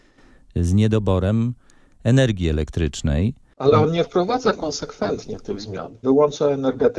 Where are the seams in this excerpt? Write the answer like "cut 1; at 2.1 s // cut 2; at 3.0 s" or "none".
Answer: cut 1; at 6.0 s